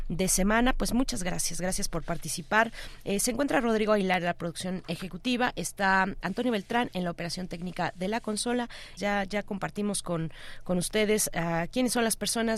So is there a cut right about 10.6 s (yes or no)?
no